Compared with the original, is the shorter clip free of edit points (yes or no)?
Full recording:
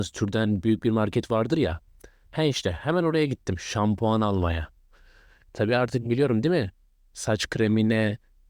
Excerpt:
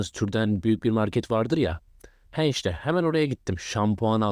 yes